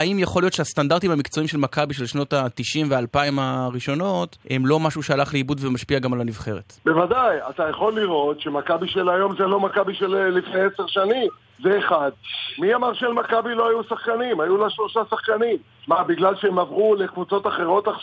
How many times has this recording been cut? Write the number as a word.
two